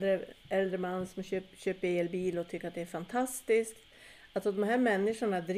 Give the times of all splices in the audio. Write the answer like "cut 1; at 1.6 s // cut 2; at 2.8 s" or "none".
none